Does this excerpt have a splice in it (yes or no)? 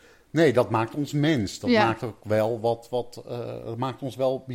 no